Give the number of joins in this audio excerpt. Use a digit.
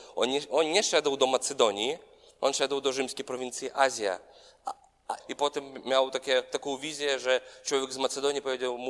1